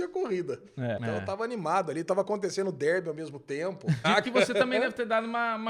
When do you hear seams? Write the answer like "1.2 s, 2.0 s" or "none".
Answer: 1.0 s, 4.0 s